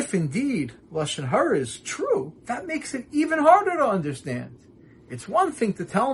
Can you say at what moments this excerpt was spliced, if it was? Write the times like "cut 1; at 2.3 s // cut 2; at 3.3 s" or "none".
cut 1; at 2.4 s